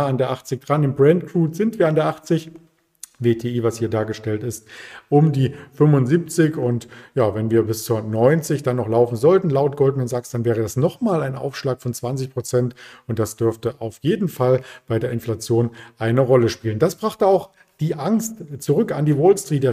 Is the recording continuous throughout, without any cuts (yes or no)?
yes